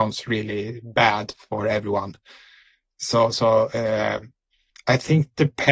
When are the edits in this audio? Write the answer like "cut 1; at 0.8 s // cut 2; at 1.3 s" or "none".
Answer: none